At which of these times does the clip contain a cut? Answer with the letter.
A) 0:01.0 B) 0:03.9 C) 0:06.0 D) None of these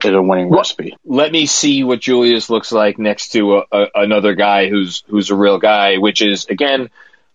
A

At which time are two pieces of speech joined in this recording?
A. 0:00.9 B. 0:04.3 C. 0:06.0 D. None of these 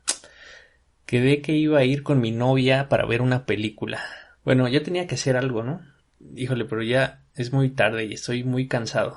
B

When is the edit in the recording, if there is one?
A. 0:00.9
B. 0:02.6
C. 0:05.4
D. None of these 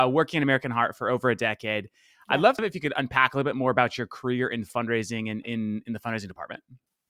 C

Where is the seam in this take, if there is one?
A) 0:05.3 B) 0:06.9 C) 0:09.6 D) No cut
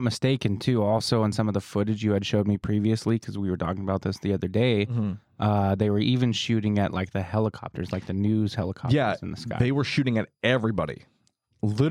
D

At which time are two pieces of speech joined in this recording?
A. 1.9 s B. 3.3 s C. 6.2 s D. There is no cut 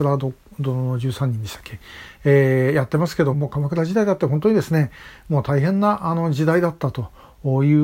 B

